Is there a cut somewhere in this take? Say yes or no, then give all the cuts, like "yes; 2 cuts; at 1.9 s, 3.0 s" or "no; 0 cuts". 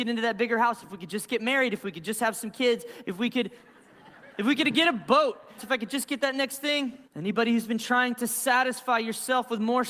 yes; 3 cuts; at 3.0 s, 5.6 s, 7.0 s